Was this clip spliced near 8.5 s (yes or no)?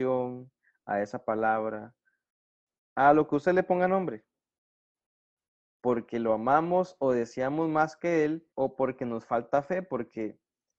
yes